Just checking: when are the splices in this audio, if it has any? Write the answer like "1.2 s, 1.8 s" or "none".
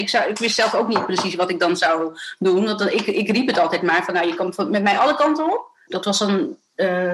5.9 s